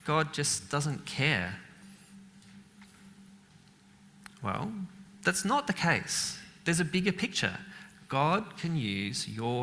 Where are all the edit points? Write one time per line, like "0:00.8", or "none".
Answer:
none

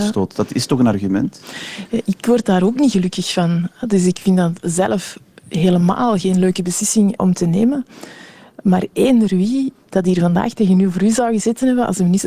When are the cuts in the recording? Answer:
0:07.2

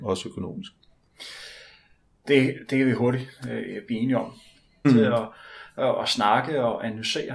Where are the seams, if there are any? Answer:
0:04.8

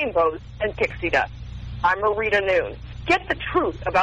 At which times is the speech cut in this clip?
none

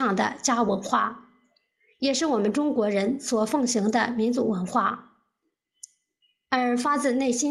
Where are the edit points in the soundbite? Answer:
none

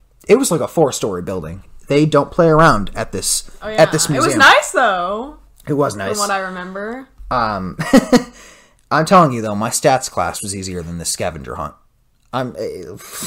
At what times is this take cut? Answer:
none

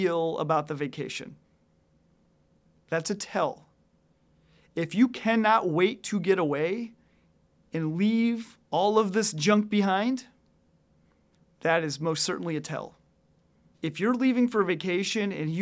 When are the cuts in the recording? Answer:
0:13.7

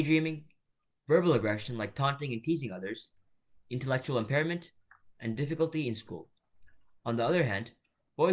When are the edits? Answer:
none

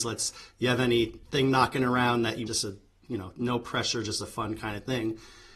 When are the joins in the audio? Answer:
0:02.5

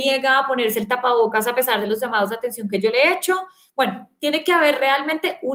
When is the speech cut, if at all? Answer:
none

